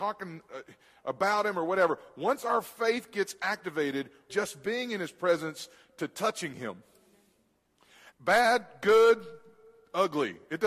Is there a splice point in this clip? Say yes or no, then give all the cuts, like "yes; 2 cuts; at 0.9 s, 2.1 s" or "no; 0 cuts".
yes; 2 cuts; at 4.3 s, 8.1 s